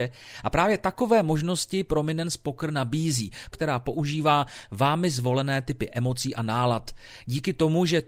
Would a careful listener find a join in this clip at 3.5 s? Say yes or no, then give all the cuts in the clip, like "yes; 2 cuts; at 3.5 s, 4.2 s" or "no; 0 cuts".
yes; 1 cut; at 3.5 s